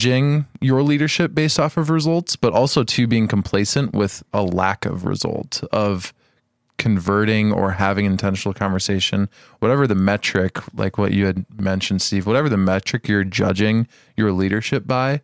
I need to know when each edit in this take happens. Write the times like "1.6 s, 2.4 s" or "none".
none

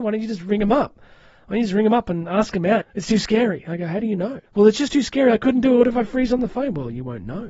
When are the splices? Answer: 2.8 s, 4.5 s

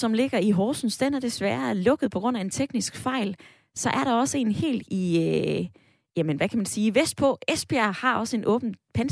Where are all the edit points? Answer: none

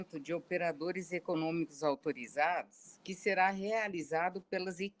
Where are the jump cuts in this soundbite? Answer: none

